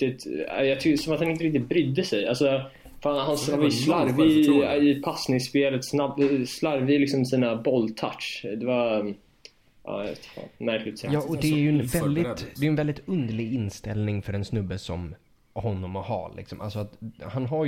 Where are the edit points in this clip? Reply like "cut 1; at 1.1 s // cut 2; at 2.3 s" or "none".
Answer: none